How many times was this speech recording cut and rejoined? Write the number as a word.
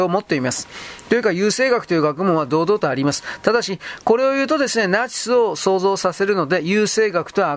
zero